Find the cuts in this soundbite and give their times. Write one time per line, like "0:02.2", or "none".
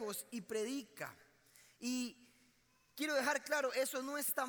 none